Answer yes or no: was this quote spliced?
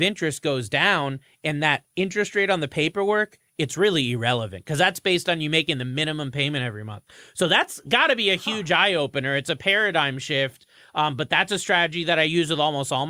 no